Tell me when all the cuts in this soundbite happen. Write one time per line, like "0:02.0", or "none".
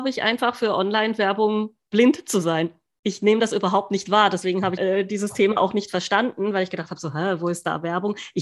0:04.8